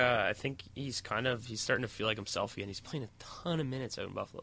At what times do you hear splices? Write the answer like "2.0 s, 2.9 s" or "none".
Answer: none